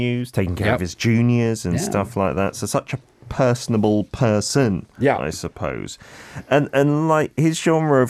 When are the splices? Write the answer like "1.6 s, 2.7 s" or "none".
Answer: none

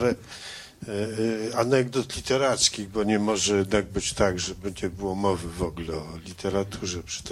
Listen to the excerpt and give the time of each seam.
none

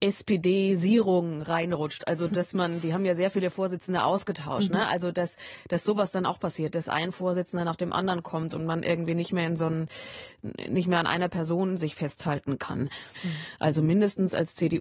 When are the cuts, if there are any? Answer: 13.2 s

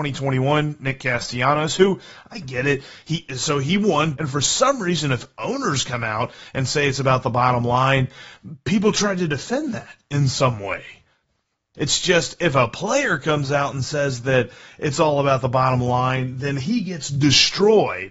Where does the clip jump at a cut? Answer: 4.1 s, 11.7 s

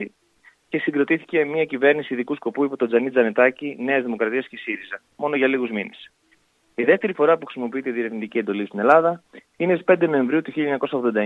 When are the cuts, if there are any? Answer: none

